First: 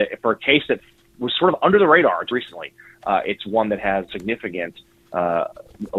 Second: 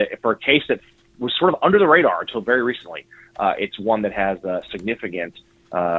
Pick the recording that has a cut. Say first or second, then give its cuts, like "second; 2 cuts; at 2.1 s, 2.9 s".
first; 2 cuts; at 2.3 s, 4.1 s